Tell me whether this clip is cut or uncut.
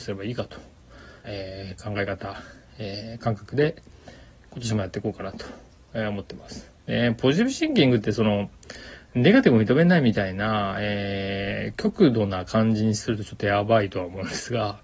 cut